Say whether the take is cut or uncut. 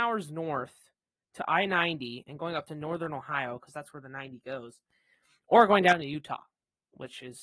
uncut